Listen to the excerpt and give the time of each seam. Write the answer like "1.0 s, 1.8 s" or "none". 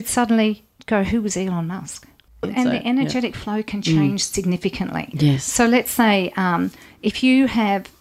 2.4 s